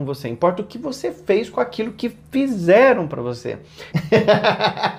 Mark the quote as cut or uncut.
cut